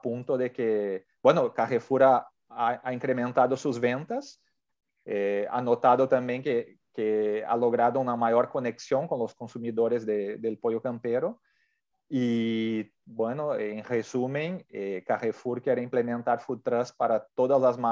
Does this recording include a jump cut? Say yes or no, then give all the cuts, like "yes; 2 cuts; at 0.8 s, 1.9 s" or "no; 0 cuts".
no; 0 cuts